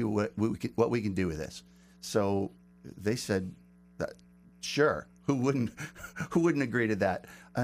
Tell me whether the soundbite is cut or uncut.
cut